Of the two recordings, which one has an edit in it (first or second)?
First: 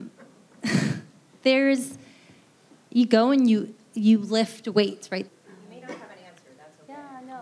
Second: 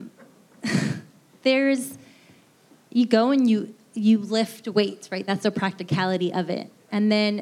first